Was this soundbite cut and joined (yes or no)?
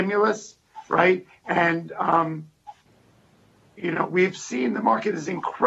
no